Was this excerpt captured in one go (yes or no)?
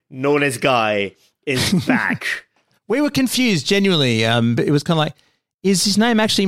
yes